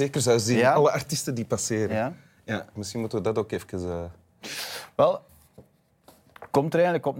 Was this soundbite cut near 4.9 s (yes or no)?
no